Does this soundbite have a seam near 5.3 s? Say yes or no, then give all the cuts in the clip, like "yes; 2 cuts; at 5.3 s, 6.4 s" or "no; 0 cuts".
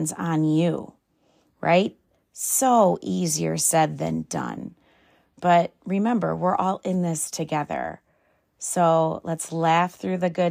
no; 0 cuts